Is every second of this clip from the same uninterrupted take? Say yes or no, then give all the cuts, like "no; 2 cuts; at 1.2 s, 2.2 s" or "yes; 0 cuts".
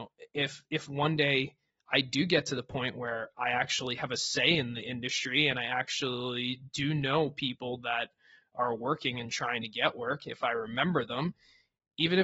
yes; 0 cuts